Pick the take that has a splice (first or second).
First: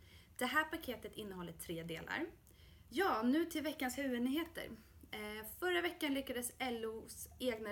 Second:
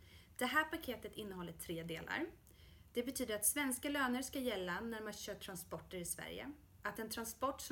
first